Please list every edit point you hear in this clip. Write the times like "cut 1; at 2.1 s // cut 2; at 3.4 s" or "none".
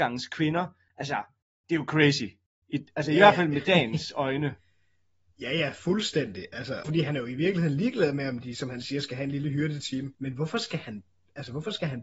cut 1; at 6.8 s // cut 2; at 10.1 s